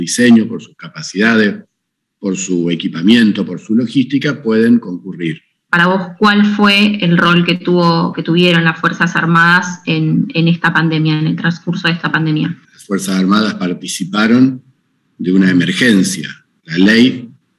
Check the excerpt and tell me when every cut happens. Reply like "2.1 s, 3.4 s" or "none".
5.7 s